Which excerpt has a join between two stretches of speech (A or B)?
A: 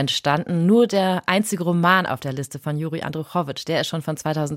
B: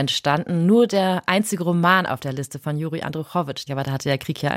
B